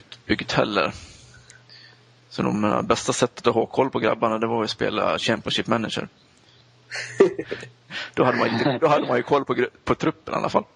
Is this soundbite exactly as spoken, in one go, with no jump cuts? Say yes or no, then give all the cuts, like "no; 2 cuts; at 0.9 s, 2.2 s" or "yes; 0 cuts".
yes; 0 cuts